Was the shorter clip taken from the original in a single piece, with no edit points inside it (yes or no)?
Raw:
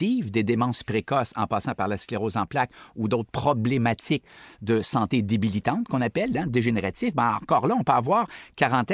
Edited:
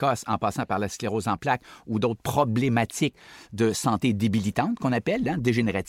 yes